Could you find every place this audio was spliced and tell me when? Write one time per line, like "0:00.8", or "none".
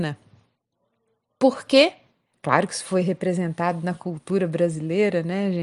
0:02.3